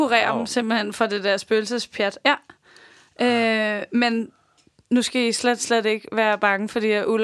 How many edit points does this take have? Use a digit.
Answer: 0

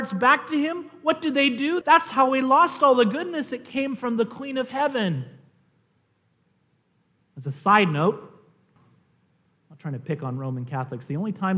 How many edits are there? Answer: 2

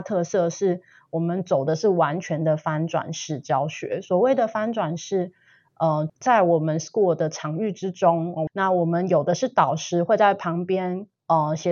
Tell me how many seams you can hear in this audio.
2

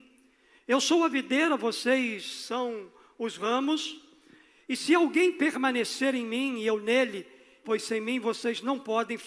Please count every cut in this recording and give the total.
1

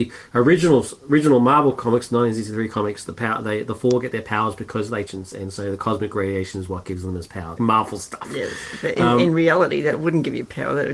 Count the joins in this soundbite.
2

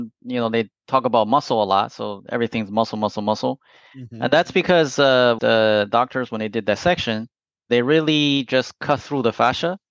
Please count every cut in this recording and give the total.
1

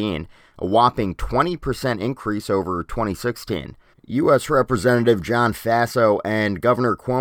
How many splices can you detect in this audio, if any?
1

